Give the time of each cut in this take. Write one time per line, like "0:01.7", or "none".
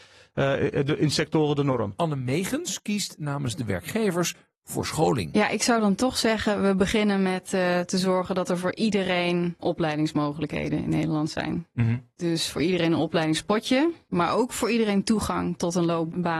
none